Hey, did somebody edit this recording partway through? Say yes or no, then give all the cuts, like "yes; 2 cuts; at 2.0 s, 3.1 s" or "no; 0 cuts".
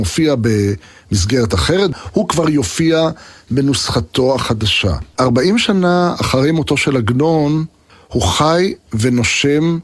no; 0 cuts